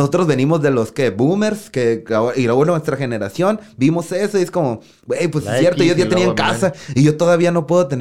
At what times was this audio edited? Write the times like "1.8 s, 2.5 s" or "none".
none